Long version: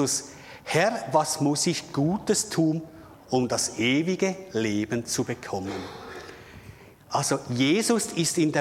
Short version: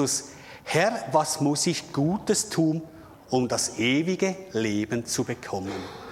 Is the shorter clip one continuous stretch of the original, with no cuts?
yes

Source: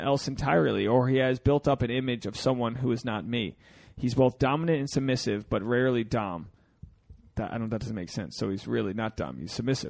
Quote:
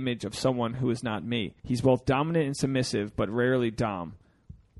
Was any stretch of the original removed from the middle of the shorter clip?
yes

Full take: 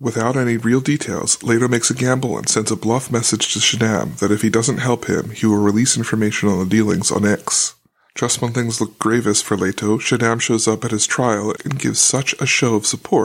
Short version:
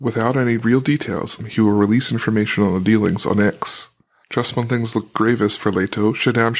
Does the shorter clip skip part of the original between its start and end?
yes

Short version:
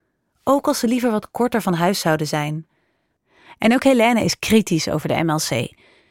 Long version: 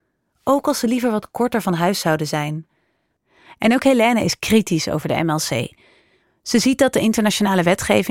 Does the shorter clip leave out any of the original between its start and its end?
no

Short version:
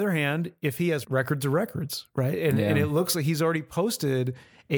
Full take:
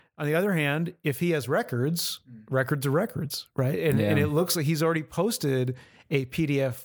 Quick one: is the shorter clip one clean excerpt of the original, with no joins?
no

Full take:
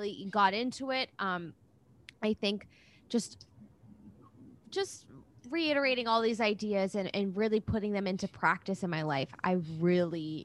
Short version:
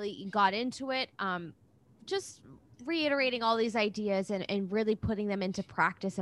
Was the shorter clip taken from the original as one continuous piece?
no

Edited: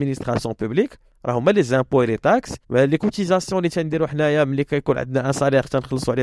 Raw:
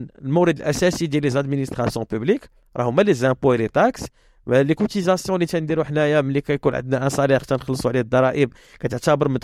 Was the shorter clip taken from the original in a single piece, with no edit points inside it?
no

